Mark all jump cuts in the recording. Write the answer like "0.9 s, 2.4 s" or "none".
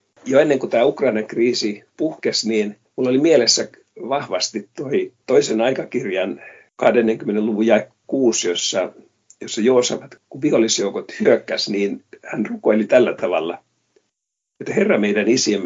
none